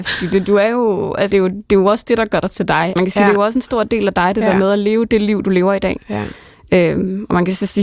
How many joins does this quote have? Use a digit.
2